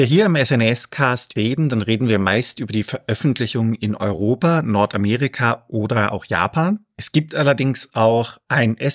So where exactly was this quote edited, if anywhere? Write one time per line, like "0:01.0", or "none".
none